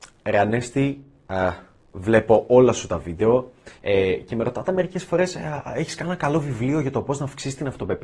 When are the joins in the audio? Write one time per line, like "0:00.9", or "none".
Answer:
0:03.8